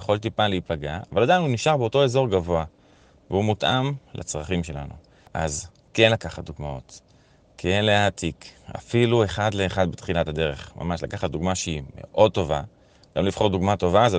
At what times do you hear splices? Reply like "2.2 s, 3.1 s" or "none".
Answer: none